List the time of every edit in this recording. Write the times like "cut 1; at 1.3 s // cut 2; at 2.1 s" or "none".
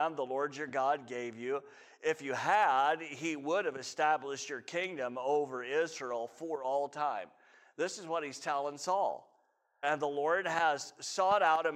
cut 1; at 9.8 s